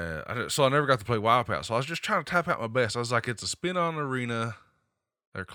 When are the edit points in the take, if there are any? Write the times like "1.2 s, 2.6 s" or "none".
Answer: none

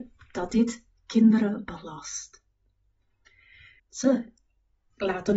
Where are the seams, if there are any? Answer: 3.8 s

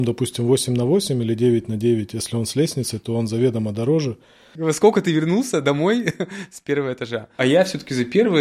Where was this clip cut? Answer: 4.6 s

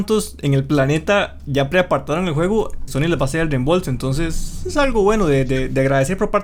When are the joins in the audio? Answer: 2.9 s

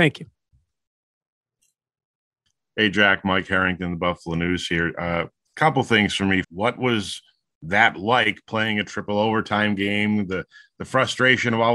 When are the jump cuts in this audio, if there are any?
6.4 s

